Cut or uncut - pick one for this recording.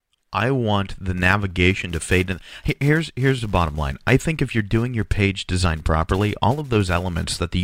uncut